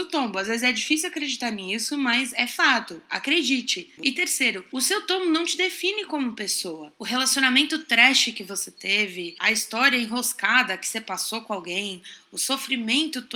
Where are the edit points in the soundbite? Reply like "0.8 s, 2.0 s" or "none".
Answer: 4.0 s

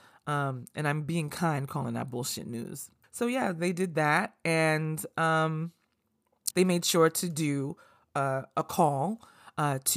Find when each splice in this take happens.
3.0 s, 6.5 s

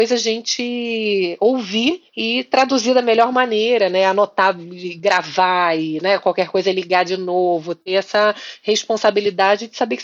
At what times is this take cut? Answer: 2.1 s

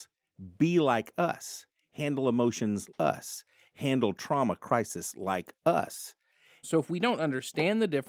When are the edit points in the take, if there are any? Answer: 2.9 s, 6.6 s

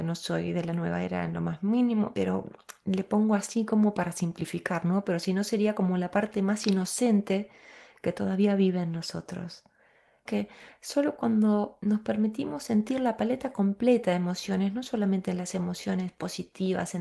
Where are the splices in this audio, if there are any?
10.2 s

